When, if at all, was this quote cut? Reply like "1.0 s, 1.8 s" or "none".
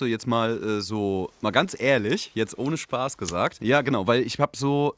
3.6 s